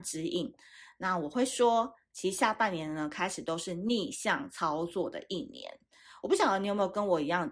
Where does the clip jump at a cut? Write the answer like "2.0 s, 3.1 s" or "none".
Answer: none